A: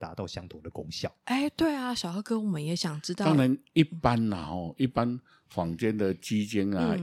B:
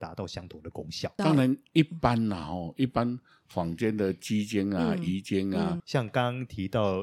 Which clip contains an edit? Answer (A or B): B